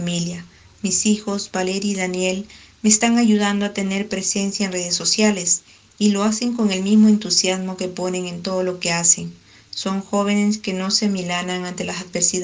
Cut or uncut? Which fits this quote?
uncut